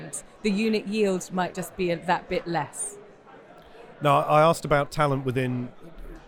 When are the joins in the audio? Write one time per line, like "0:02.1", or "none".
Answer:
none